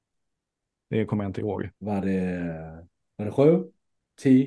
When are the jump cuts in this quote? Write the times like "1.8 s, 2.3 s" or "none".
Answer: 1.7 s

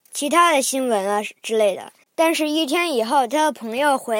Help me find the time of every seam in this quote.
2.0 s

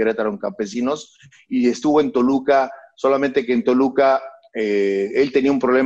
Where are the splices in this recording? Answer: none

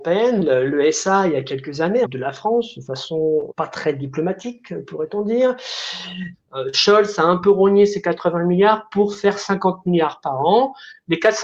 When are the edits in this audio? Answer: 2.0 s, 3.5 s, 6.3 s

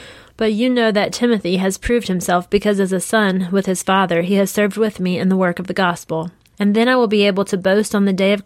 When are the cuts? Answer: 6.5 s

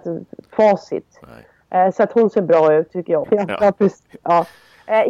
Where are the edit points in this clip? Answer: 3.2 s

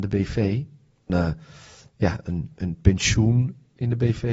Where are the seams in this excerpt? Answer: 1.1 s

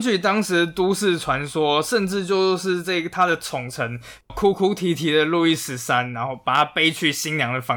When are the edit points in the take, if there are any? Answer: 4.3 s

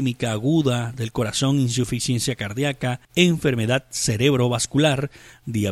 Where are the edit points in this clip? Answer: 3.1 s

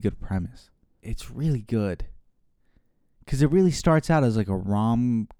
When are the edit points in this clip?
1.0 s

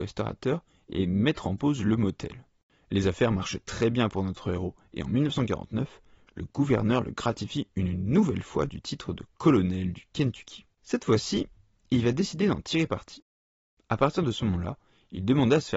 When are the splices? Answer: none

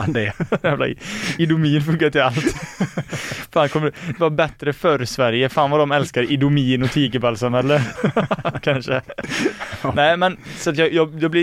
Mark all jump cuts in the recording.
7.9 s

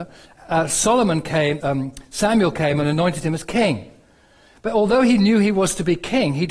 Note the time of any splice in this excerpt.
1.6 s

